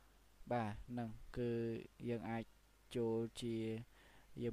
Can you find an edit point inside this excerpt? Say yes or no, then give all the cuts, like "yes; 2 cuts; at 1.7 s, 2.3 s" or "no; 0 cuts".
no; 0 cuts